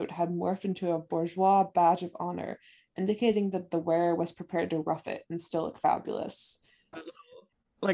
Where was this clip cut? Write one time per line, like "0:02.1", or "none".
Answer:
0:06.9